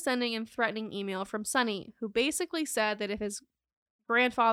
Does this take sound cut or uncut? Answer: uncut